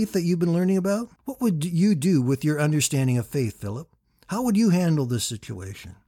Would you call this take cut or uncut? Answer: cut